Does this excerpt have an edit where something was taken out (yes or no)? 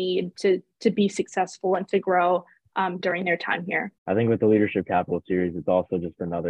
yes